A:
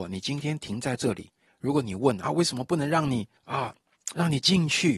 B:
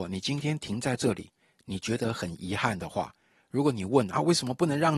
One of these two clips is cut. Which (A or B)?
A